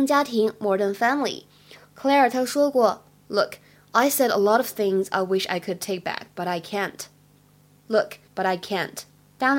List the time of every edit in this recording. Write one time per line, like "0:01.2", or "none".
0:08.3